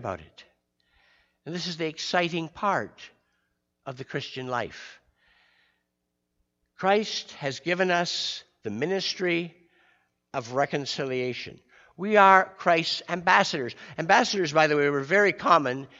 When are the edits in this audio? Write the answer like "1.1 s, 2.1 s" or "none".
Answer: none